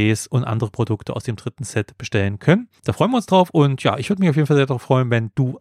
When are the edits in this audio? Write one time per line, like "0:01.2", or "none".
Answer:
0:02.8